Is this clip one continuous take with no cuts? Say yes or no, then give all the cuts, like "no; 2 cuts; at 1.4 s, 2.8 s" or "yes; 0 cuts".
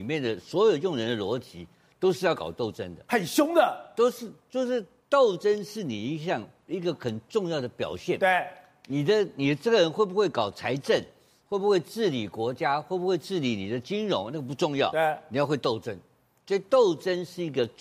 yes; 0 cuts